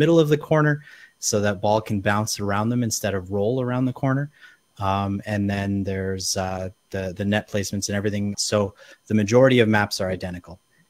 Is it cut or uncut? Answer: cut